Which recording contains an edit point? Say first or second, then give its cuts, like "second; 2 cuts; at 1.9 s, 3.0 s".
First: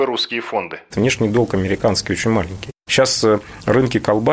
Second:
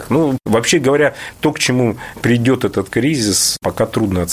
first; 2 cuts; at 0.9 s, 2.8 s